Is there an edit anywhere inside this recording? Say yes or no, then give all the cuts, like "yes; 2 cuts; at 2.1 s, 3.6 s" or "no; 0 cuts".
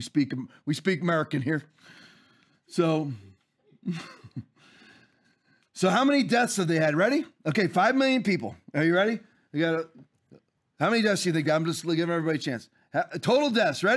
no; 0 cuts